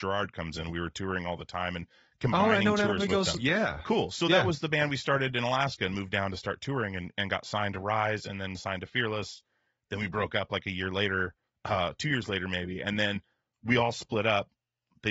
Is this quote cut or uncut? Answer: cut